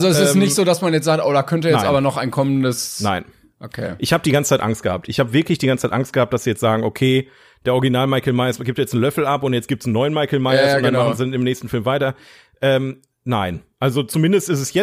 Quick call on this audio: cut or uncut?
uncut